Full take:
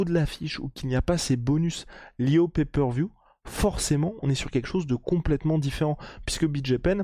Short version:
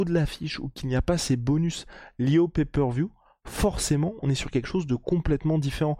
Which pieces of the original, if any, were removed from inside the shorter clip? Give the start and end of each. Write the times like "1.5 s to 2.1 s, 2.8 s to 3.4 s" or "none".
none